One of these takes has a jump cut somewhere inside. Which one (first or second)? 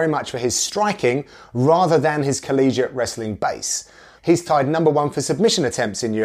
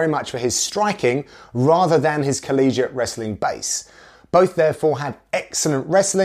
first